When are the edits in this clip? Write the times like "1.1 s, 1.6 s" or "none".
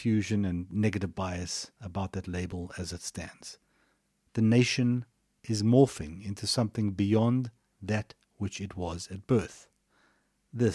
4.3 s